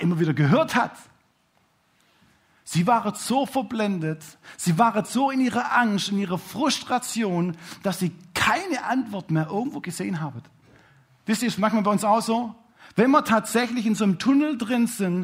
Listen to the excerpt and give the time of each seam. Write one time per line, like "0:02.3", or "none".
none